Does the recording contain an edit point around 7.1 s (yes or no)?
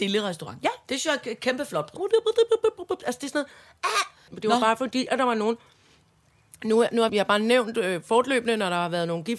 yes